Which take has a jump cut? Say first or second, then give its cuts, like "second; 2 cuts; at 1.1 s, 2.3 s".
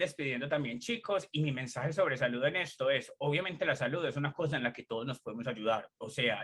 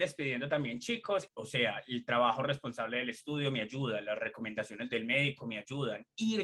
second; 1 cut; at 1.3 s